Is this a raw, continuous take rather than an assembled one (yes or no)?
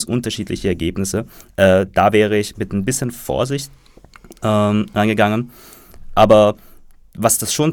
yes